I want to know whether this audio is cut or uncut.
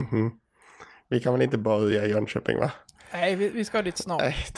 uncut